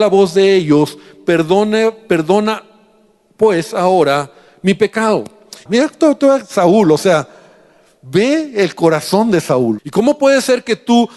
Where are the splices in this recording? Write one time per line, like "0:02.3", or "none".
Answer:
0:05.7
0:09.8